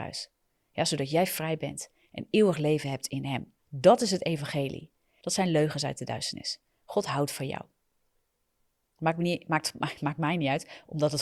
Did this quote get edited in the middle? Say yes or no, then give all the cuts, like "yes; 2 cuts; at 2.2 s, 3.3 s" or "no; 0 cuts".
yes; 2 cuts; at 3.6 s, 5.2 s